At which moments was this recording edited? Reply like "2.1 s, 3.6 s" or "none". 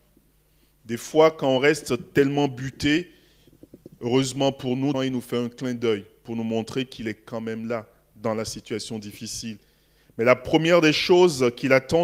4.9 s